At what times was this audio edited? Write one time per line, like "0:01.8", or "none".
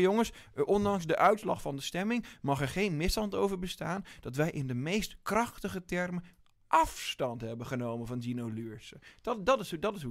none